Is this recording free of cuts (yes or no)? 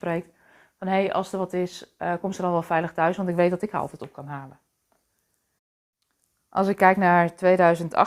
yes